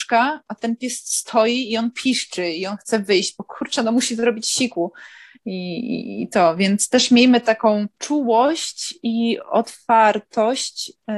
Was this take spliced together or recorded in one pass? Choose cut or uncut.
cut